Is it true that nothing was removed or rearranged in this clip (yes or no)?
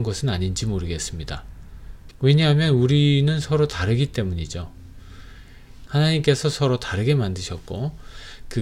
no